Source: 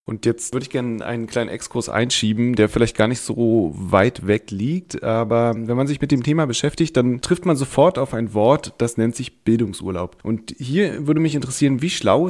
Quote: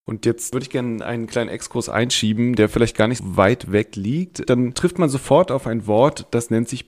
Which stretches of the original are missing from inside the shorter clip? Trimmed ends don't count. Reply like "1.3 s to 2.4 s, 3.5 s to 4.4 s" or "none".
3.2 s to 3.7 s, 5.0 s to 6.9 s